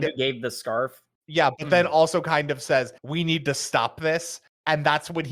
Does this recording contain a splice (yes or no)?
yes